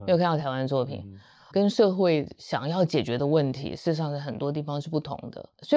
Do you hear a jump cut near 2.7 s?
no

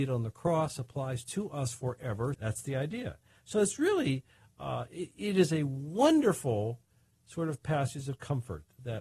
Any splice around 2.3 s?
yes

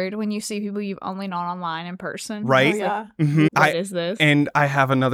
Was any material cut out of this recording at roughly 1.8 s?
no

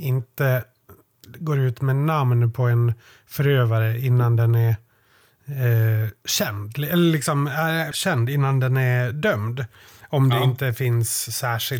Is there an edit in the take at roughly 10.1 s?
no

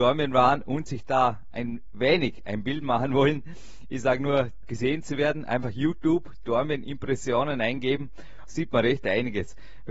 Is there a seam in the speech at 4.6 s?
yes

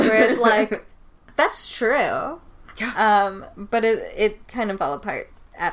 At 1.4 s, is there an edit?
yes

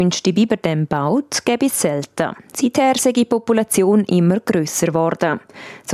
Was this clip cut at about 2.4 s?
yes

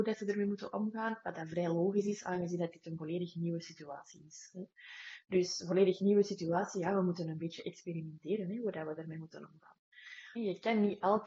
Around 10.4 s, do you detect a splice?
yes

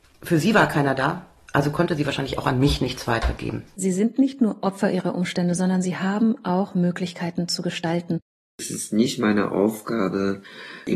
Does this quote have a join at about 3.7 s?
yes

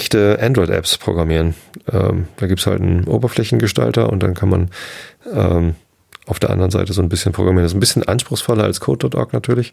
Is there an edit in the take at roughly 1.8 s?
no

